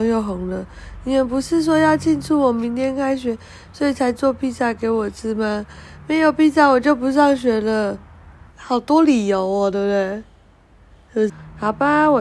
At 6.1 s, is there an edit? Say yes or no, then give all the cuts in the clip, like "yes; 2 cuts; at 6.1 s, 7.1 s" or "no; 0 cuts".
no; 2 cuts; at 8.5 s, 11.3 s